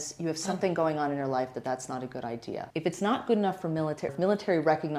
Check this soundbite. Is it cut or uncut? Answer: cut